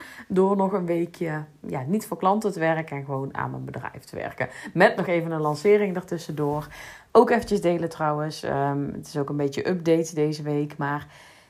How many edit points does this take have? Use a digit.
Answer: 1